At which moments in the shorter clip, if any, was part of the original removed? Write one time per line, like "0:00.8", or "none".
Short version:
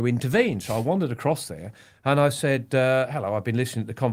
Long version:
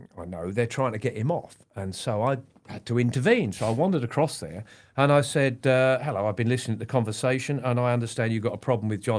none